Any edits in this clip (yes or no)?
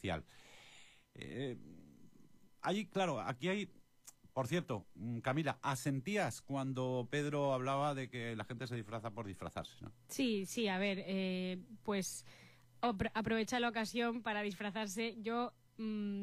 no